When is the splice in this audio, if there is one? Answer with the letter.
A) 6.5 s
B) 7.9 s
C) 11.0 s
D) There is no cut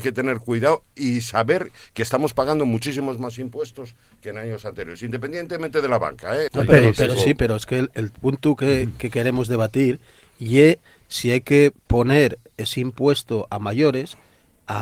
A